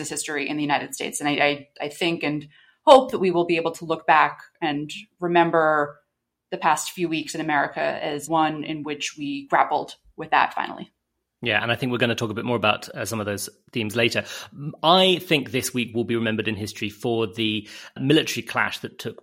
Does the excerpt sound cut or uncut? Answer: uncut